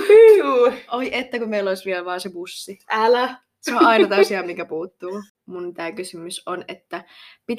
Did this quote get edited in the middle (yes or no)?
no